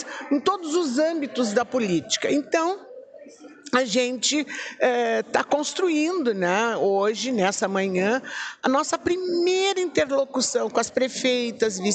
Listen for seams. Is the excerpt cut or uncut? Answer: uncut